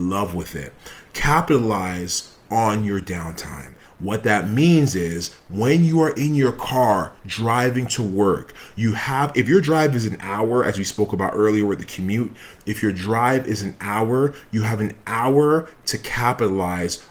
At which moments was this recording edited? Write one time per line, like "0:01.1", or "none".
none